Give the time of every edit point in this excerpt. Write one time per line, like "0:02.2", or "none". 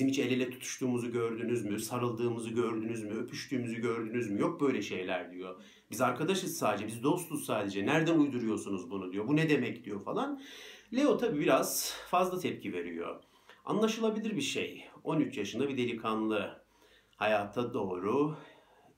none